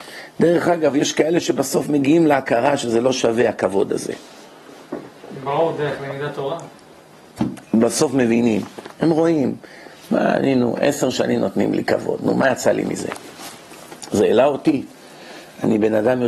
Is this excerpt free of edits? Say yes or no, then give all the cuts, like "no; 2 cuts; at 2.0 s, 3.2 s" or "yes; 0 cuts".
yes; 0 cuts